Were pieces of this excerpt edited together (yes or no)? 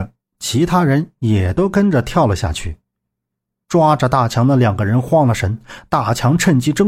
yes